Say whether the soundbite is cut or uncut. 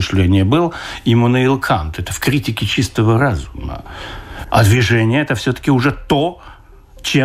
cut